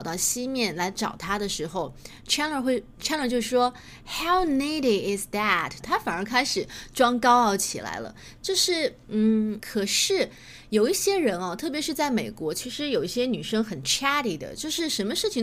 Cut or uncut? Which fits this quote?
cut